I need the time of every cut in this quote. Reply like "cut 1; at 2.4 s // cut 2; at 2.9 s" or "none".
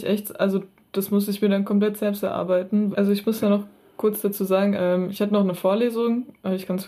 cut 1; at 2.9 s // cut 2; at 4.7 s